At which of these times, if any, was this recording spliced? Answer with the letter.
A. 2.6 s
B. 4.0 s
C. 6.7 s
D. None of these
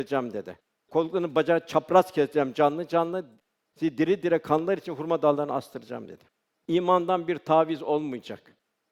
C